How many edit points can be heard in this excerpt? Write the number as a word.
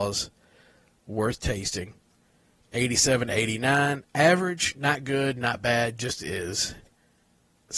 zero